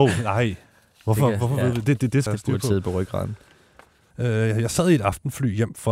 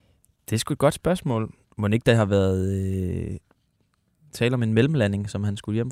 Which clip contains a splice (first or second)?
first